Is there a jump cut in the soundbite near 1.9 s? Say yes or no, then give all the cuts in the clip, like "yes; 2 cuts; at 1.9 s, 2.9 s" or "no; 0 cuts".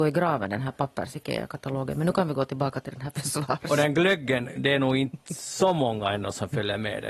no; 1 cut; at 4.5 s